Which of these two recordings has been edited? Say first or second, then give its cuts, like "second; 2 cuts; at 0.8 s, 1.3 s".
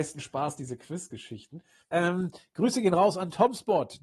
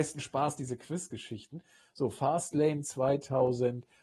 first; 1 cut; at 1.8 s